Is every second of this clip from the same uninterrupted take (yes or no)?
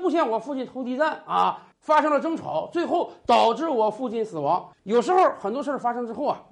no